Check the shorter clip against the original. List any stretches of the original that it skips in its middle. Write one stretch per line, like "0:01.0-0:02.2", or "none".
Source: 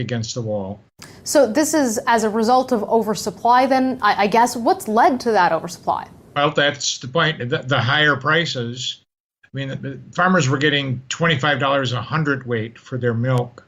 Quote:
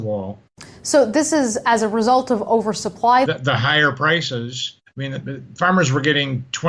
0:03.7-0:07.5
0:09.0-0:09.4